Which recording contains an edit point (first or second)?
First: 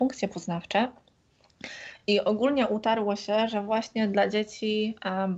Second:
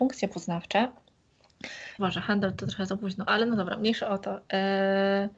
second